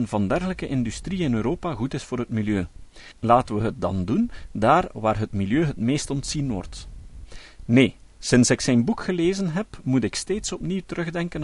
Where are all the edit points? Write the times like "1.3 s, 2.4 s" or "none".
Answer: 3.1 s